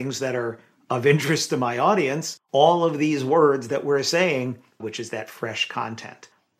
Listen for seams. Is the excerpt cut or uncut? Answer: cut